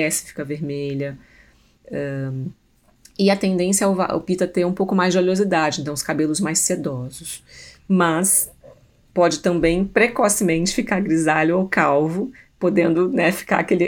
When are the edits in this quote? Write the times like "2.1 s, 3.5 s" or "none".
none